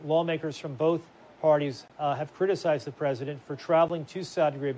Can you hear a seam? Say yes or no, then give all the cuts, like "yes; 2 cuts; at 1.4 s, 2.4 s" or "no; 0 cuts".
no; 0 cuts